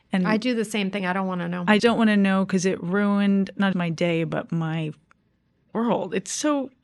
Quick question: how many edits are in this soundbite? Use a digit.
2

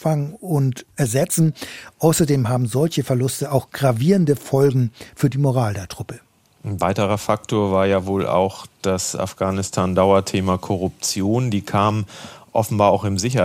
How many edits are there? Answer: 0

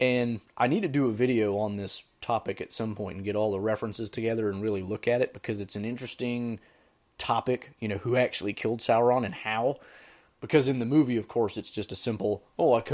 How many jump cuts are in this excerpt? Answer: 0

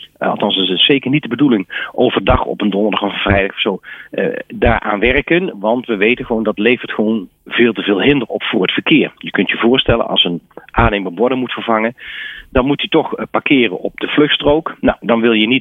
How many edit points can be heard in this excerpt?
0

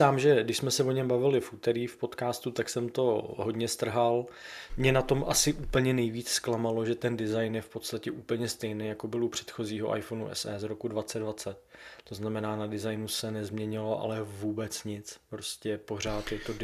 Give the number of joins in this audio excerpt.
1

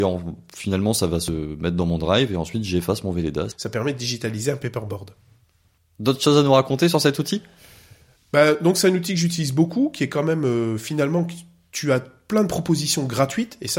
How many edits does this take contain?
1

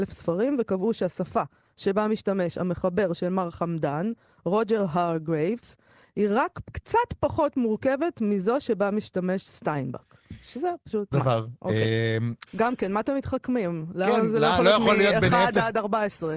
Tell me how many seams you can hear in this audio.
2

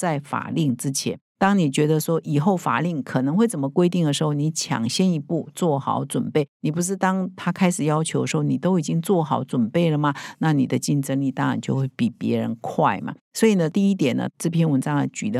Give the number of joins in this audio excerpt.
0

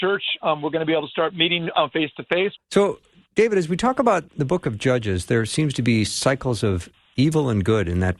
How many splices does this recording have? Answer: 2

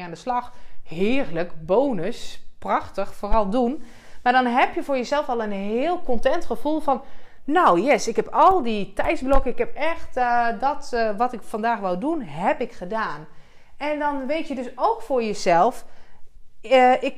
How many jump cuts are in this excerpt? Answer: 0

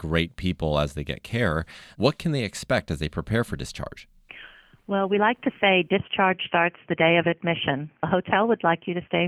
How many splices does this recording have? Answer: 1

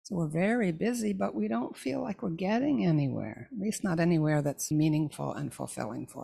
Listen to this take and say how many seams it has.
1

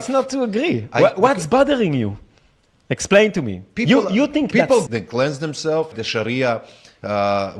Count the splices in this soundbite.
2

